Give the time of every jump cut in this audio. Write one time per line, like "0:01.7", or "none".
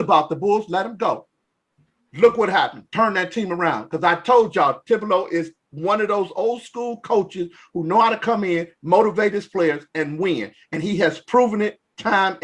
none